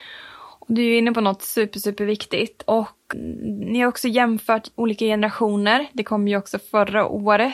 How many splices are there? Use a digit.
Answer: 1